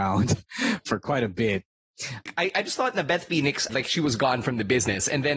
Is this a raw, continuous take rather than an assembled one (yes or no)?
no